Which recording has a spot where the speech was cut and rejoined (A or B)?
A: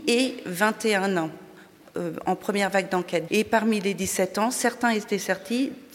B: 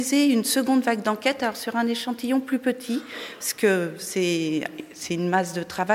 A